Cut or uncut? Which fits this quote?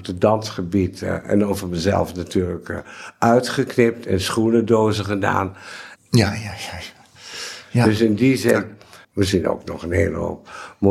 cut